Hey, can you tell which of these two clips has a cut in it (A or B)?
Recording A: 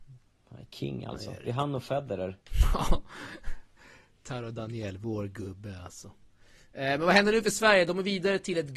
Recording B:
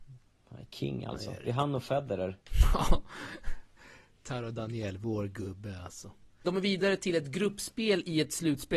B